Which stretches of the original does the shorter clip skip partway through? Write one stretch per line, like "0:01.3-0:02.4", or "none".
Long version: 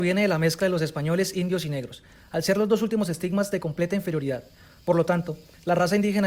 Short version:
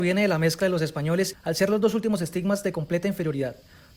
0:01.3-0:02.2

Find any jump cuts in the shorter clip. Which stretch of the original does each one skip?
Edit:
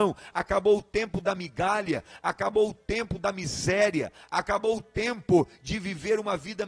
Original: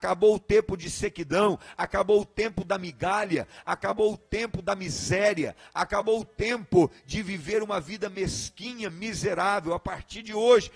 none

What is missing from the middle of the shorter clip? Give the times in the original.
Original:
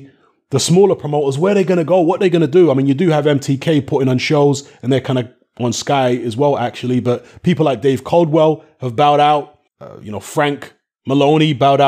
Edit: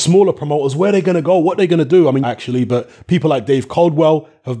0:02.8-0:06.6

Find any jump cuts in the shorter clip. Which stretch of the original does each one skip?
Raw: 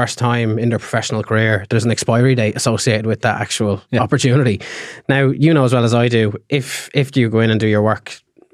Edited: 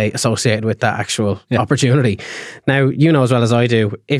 none

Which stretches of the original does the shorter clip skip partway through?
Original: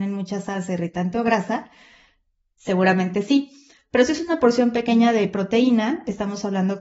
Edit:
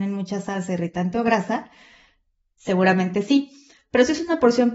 none

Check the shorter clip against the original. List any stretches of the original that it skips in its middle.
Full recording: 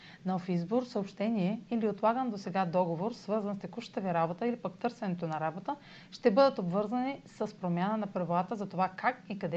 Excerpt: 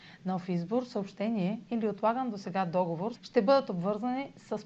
0:03.1-0:06.0

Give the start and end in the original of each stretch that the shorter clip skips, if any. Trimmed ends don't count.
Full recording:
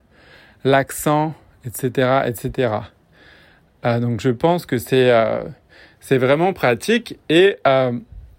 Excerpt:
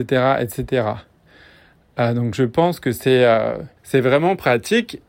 0:05.6-0:05.9

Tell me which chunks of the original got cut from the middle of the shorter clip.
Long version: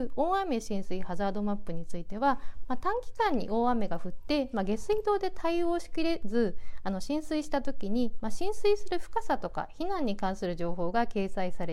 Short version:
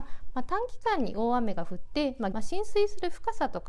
0:04.7-0:08.2

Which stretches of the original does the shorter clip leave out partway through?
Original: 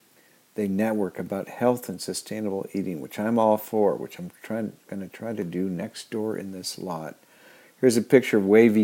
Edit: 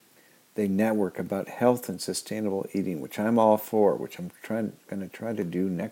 none

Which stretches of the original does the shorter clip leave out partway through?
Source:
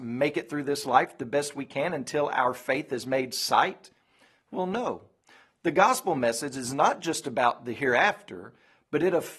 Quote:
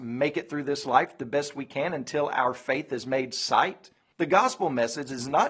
0:04.1-0:05.6

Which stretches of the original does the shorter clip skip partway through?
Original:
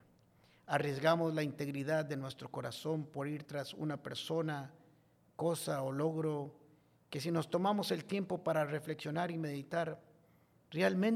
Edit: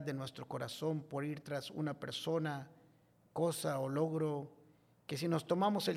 none

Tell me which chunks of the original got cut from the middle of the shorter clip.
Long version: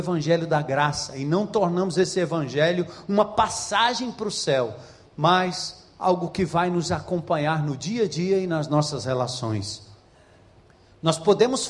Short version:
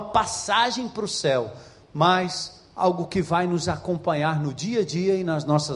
none

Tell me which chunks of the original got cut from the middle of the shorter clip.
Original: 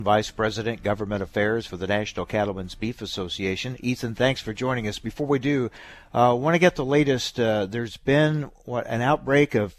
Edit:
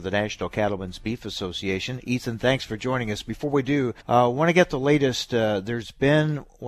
0:05.8-0:06.1

